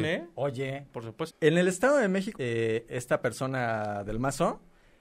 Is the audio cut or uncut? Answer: cut